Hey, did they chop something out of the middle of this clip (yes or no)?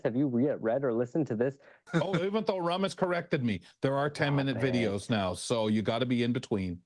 yes